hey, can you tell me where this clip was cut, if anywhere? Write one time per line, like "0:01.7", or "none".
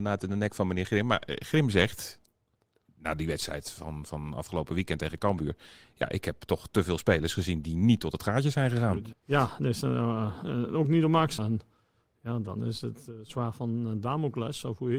0:09.1
0:11.4